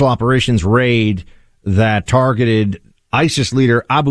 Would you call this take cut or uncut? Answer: uncut